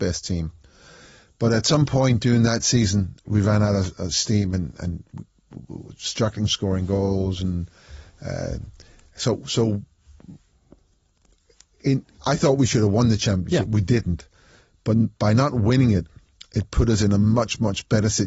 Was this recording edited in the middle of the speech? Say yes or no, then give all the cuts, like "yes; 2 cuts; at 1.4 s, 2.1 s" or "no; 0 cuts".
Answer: no; 0 cuts